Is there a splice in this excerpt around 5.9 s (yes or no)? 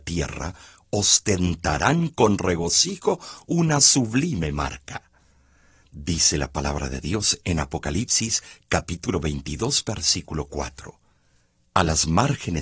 no